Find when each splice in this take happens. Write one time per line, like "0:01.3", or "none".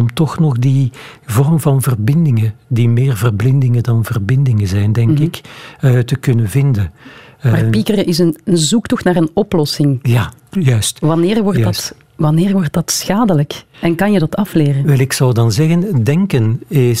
none